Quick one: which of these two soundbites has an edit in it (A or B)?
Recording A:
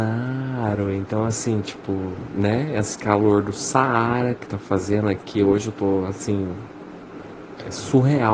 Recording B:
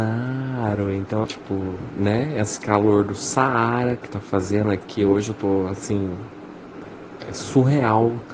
B